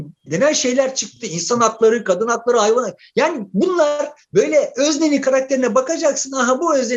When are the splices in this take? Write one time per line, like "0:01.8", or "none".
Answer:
none